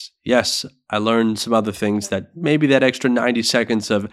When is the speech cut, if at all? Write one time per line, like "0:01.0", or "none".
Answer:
none